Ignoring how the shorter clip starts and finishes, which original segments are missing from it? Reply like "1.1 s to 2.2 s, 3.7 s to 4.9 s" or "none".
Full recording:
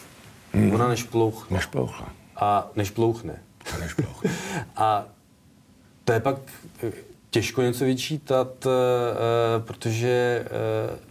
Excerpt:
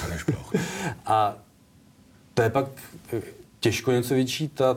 none